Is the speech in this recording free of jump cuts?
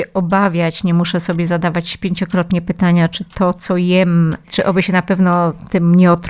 yes; 0 cuts

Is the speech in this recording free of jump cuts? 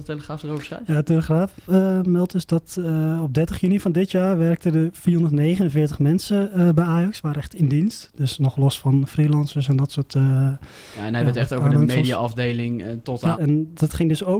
no; 1 cut; at 13.3 s

